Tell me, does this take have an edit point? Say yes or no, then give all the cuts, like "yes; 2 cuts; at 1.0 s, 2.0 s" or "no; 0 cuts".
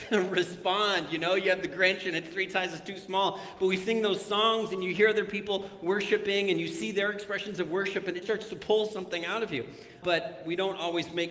yes; 2 cuts; at 8.2 s, 10.0 s